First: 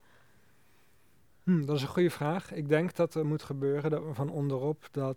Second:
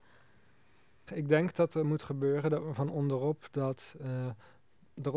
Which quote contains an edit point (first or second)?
second